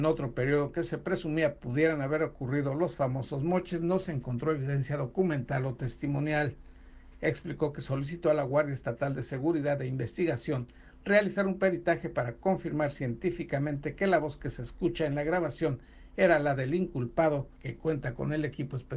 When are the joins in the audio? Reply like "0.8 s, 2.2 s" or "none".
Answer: 17.5 s